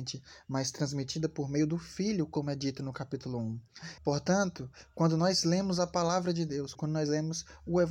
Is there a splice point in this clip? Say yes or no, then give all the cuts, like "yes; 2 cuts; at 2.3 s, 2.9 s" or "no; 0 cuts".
yes; 2 cuts; at 4.0 s, 6.8 s